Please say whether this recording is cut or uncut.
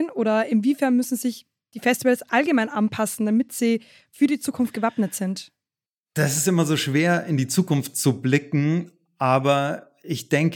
uncut